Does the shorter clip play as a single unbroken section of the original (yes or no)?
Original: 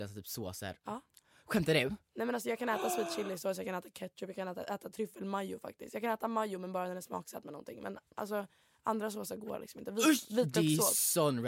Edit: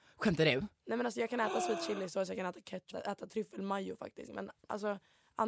no